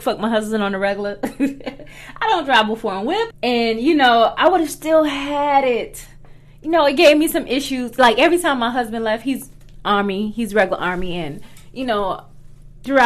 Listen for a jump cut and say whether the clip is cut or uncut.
cut